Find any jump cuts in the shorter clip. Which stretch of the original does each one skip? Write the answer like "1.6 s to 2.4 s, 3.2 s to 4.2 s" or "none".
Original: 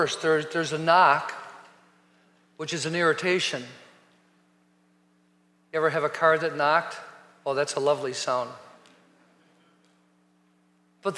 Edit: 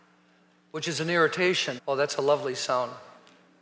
3.6 s to 7.4 s